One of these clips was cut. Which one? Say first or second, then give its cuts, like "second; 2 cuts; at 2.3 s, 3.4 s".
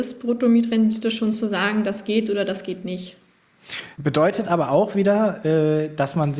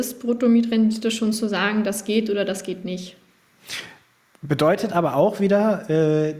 first; 1 cut; at 3.9 s